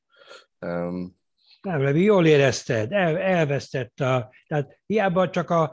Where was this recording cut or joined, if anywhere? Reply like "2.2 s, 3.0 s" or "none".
none